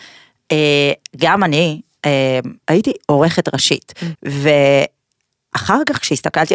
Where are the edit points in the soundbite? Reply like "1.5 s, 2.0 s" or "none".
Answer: 2.6 s, 4.1 s